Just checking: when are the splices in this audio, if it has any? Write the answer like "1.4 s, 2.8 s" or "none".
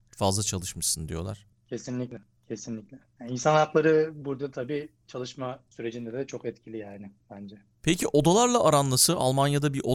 none

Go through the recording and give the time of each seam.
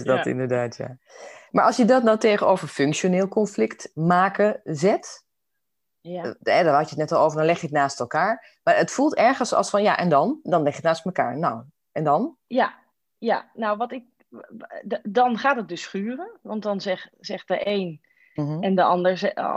18.4 s

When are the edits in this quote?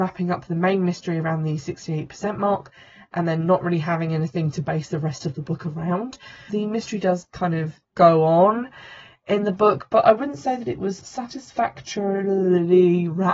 6.5 s

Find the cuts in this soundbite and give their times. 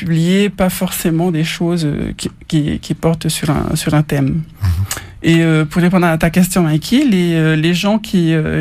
none

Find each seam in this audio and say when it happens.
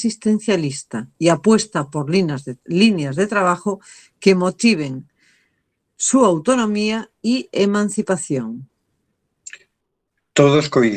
1.1 s

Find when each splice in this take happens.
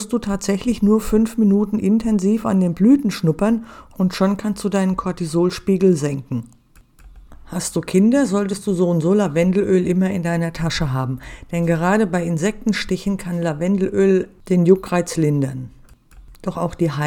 none

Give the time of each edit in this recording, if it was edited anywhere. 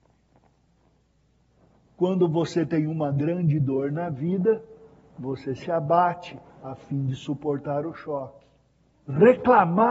8.9 s

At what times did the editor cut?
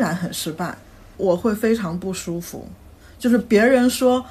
1.2 s

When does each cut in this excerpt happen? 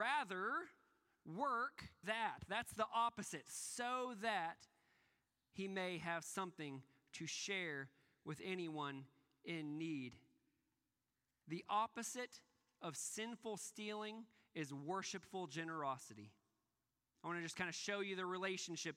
2.0 s, 17.1 s

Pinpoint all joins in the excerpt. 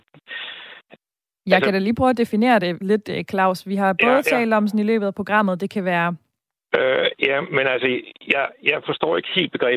6.6 s

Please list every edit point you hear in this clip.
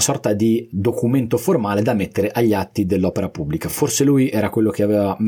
none

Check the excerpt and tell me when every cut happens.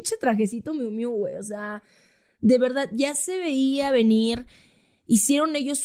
none

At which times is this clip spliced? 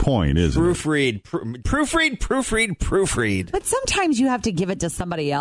1.6 s

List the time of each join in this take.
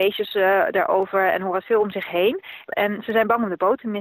2.7 s

